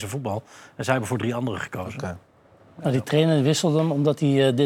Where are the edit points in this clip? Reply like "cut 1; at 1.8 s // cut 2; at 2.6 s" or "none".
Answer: none